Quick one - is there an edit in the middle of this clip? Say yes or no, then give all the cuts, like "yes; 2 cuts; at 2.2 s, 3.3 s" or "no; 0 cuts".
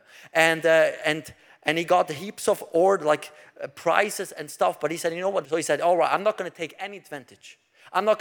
yes; 1 cut; at 5.4 s